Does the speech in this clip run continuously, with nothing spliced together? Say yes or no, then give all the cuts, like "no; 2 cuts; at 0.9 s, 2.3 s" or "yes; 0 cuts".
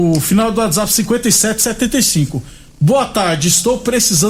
yes; 0 cuts